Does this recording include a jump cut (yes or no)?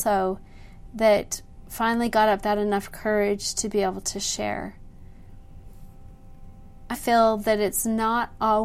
yes